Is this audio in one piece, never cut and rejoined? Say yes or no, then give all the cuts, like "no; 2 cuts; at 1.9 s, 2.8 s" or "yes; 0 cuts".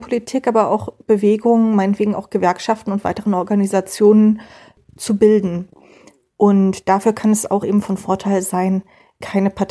yes; 0 cuts